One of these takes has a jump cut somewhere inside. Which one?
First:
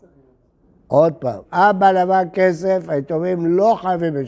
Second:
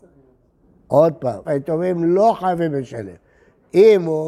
second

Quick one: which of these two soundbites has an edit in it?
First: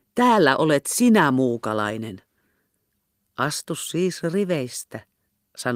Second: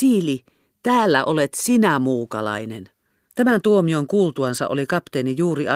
second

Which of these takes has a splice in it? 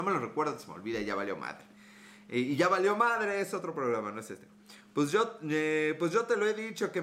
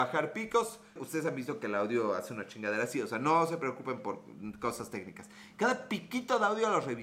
second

